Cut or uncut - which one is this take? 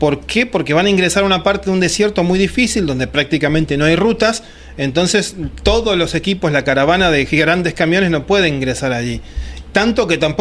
uncut